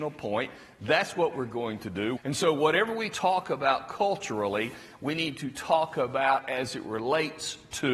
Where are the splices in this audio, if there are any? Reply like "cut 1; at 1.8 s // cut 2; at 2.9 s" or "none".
cut 1; at 2.2 s